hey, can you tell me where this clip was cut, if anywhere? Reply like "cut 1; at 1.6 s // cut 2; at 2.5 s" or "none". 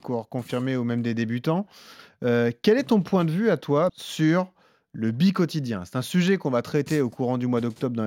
cut 1; at 3.9 s